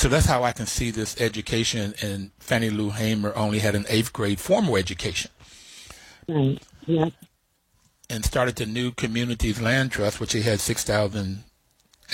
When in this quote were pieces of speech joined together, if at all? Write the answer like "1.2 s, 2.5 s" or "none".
6.3 s